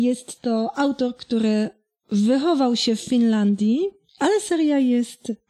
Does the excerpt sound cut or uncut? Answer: uncut